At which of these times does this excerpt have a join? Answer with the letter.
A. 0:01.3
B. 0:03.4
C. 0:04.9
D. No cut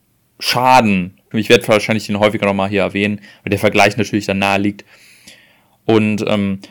A